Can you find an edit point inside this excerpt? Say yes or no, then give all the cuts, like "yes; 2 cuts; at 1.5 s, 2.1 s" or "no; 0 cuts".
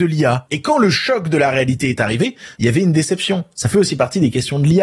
yes; 1 cut; at 2.5 s